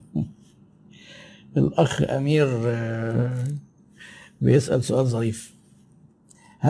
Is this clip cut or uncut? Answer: uncut